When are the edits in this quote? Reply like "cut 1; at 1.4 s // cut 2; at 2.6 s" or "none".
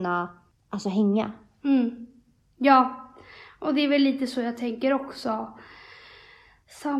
none